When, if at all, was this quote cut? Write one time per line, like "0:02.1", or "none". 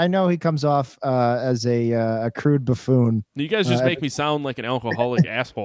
none